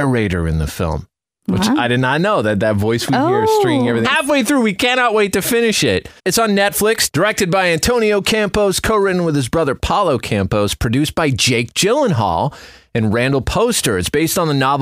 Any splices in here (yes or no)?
yes